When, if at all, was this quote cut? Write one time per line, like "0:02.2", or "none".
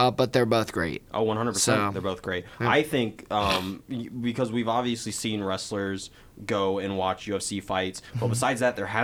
none